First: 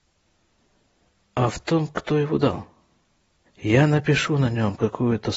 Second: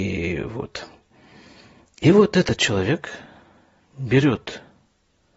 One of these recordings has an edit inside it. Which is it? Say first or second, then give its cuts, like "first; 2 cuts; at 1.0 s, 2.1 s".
first; 1 cut; at 3.4 s